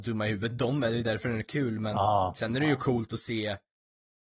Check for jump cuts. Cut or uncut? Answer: uncut